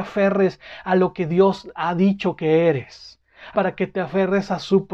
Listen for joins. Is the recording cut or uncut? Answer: cut